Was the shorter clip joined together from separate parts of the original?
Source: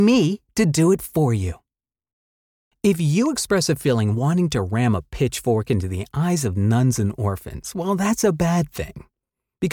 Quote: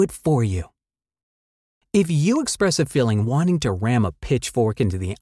no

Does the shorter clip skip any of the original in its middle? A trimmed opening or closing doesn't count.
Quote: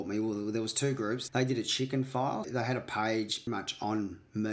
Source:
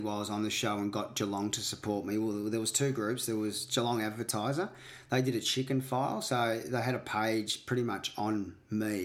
yes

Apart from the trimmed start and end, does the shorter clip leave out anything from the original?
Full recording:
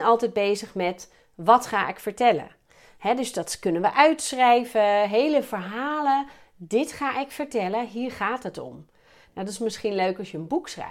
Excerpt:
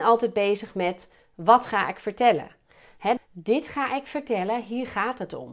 yes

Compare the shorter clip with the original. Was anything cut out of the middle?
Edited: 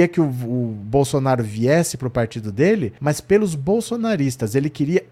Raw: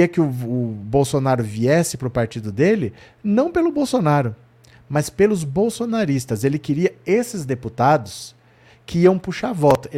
yes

